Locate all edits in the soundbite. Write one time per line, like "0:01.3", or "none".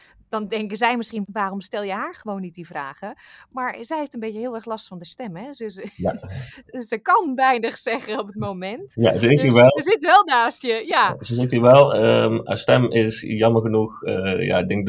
none